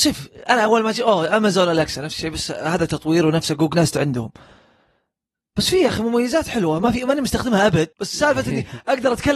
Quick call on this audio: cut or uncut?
cut